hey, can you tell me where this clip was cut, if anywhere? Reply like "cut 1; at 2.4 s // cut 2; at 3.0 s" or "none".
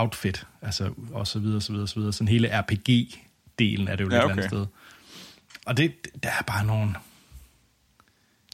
cut 1; at 1.1 s // cut 2; at 5.6 s